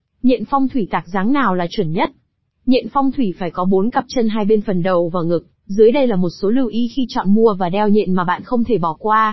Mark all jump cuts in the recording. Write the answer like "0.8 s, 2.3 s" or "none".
5.6 s